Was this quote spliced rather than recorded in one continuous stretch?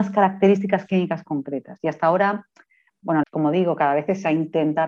yes; 1 cut; at 3.2 s

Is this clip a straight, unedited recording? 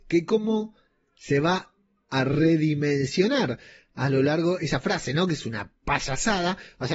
yes; 0 cuts

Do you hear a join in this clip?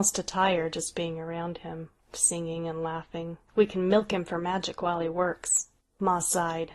yes; 3 cuts; at 2.0 s, 3.5 s, 5.8 s

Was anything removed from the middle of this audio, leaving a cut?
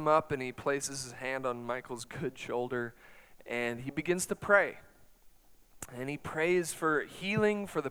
no; 0 cuts

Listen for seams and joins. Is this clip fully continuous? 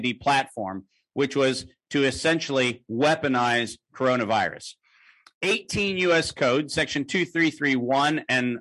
yes; 0 cuts

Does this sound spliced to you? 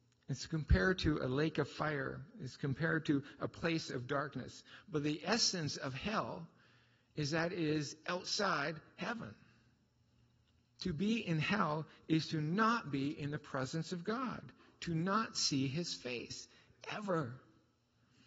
no; 0 cuts

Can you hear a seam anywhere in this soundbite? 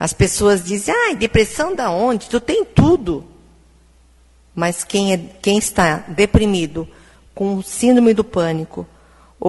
no; 0 cuts

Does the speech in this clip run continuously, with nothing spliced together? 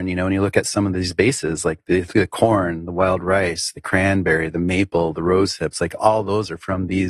yes; 0 cuts

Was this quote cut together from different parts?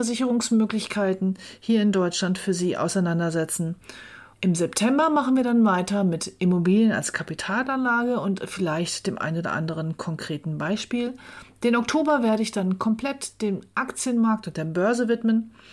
yes; 1 cut; at 4.3 s

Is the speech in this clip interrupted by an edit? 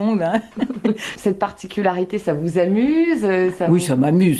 no; 0 cuts

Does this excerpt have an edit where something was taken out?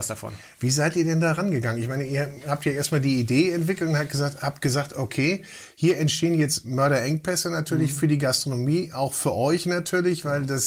no; 0 cuts

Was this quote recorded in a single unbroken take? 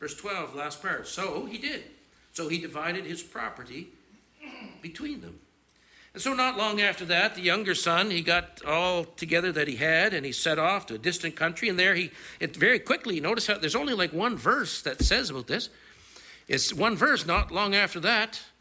yes; 0 cuts

